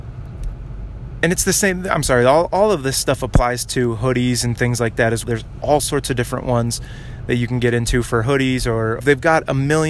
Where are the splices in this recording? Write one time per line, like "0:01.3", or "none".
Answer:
0:05.2
0:09.0